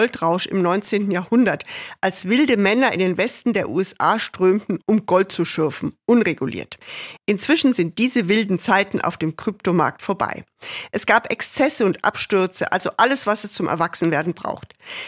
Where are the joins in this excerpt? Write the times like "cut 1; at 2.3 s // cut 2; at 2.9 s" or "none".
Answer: none